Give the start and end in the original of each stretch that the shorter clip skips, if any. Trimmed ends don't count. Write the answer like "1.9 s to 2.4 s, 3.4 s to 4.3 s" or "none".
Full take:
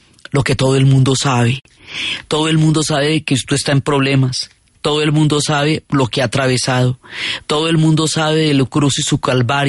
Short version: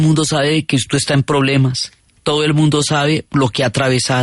none